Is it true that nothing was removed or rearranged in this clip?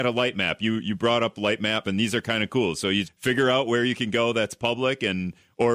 no; 2 cuts; at 1.8 s, 3.0 s

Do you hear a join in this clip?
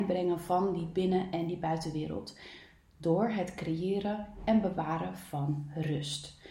no; 0 cuts

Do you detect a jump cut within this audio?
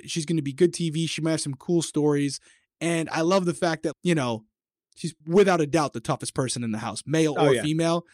yes; 2 cuts; at 3.9 s, 5.2 s

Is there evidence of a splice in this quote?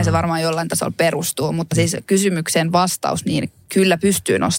no; 0 cuts

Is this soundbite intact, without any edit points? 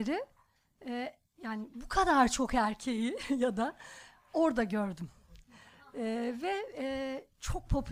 yes; 0 cuts

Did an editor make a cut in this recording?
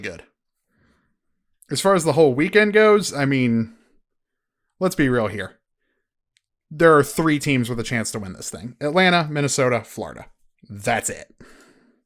no; 0 cuts

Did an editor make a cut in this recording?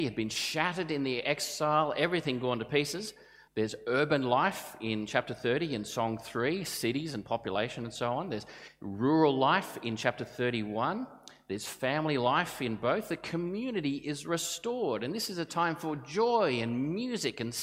yes; 1 cut; at 3.5 s

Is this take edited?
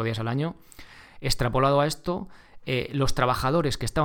no; 0 cuts

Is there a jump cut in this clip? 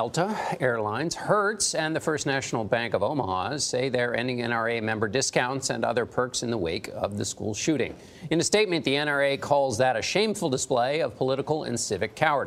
no; 0 cuts

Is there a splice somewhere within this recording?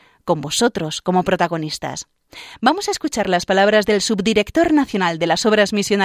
no; 0 cuts

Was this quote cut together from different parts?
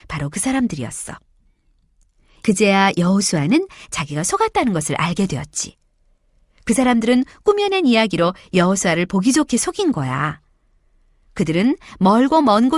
no; 0 cuts

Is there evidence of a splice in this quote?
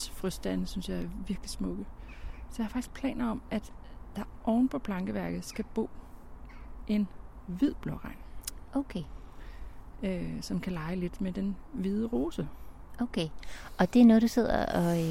no; 0 cuts

